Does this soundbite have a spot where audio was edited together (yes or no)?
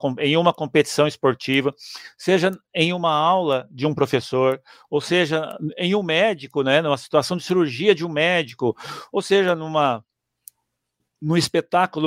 no